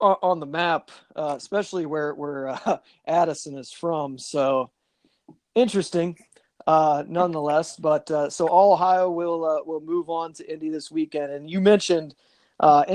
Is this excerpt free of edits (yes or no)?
yes